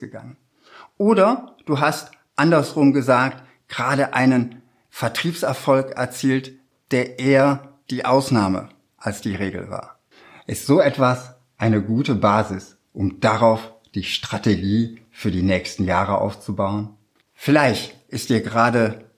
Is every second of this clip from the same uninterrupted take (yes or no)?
no